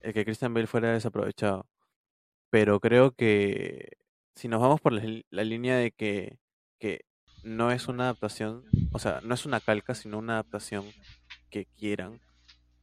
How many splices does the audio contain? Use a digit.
2